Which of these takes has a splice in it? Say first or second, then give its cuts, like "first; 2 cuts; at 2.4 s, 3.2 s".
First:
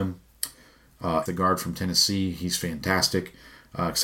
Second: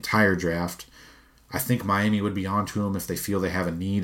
first; 1 cut; at 1.3 s